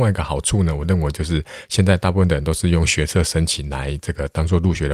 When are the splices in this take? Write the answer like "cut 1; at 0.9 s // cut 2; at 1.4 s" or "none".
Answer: none